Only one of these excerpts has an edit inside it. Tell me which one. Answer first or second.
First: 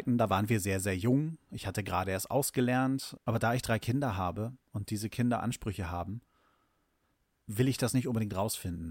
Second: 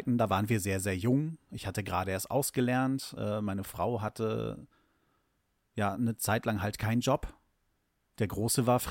first